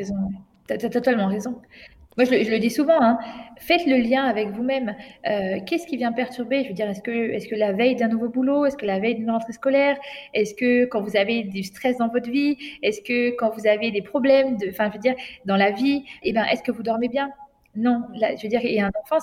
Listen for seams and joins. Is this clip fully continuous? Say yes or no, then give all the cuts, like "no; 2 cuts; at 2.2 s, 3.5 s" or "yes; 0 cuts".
no; 1 cut; at 16.2 s